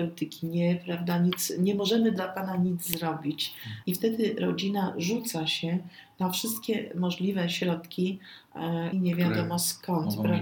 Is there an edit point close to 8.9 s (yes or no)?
yes